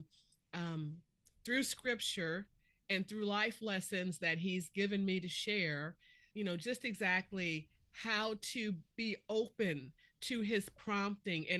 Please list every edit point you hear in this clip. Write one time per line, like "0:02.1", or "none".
0:06.3